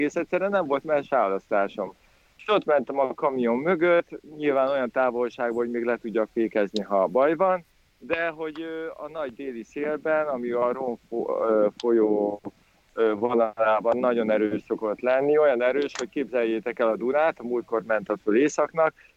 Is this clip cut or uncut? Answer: uncut